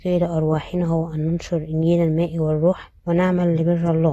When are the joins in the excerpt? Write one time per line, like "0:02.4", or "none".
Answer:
0:03.0